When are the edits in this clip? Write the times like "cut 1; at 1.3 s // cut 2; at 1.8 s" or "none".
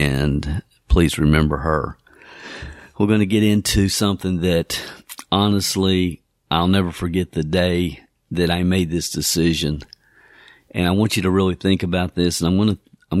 none